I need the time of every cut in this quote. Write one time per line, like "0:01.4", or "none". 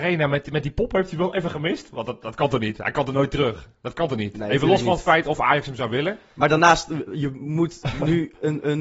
0:07.1